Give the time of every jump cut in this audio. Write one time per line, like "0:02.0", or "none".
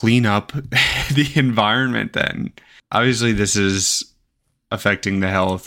none

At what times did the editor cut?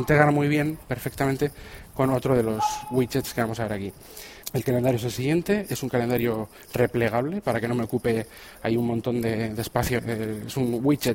0:04.4
0:10.0

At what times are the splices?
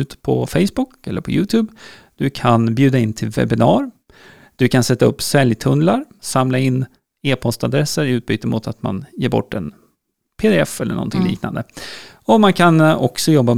0:06.2

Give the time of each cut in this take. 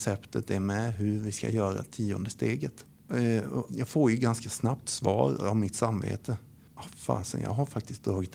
0:03.7

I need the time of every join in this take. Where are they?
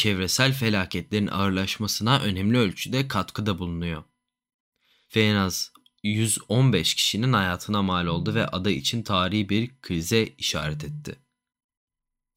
0:05.1

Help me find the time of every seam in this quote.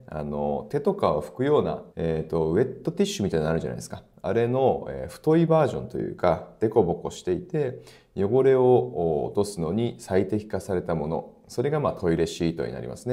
0:01.9

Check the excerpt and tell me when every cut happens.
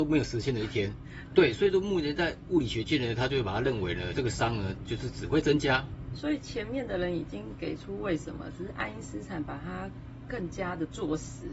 0:01.3
0:06.1

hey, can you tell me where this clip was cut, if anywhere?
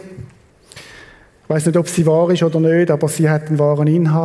none

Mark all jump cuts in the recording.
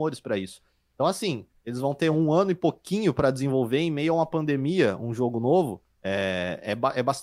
none

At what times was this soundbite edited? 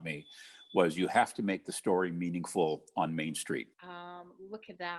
0:03.7

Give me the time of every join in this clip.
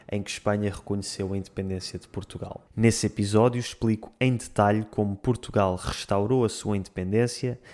0:02.7

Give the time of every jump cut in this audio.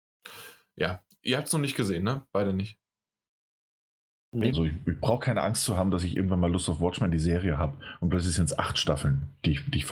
0:04.5

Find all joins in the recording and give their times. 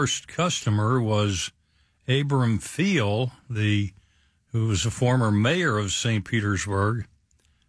none

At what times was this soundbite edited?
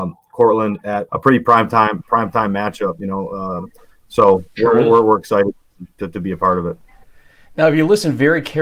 0:01.1

